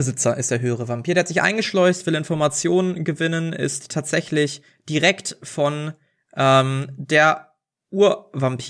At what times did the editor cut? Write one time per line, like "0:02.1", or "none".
none